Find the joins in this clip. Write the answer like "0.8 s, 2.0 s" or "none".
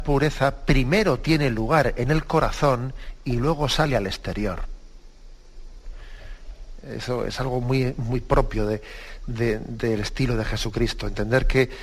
none

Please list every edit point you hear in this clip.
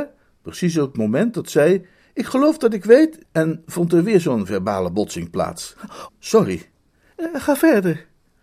3.2 s, 6.1 s

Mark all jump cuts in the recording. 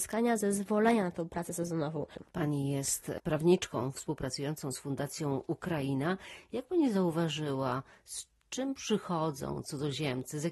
none

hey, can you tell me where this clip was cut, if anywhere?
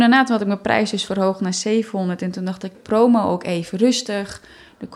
2.7 s

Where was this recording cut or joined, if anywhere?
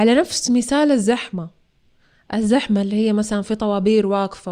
none

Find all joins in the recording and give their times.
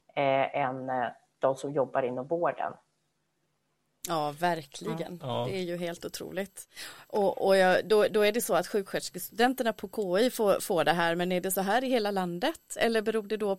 none

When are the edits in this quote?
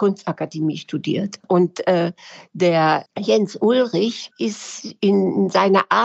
1.4 s

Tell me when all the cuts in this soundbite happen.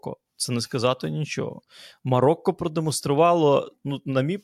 none

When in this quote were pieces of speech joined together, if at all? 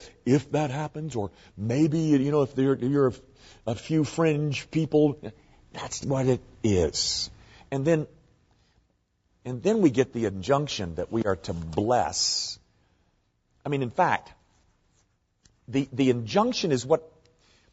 6.0 s

